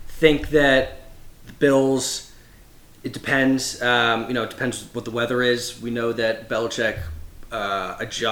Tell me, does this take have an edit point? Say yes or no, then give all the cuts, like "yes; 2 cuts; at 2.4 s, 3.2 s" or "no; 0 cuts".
no; 0 cuts